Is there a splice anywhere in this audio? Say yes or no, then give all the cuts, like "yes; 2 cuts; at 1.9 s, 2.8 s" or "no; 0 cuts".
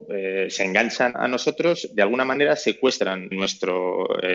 yes; 2 cuts; at 1.1 s, 3.3 s